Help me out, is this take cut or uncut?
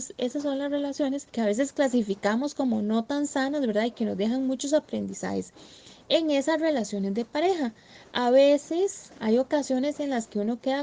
cut